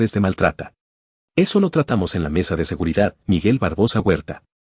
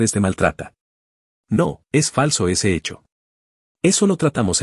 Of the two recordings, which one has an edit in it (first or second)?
first